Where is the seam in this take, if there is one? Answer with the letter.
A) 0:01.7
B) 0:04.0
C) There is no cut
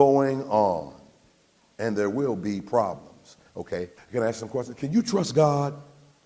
B